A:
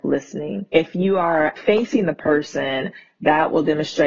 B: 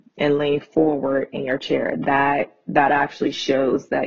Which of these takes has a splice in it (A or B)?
A